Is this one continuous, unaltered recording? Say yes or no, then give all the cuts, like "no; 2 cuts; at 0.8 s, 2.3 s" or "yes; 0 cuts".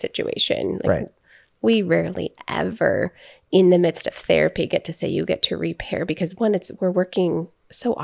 yes; 0 cuts